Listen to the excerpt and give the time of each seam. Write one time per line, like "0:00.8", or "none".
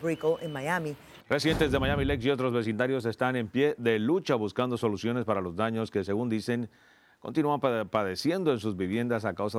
0:01.2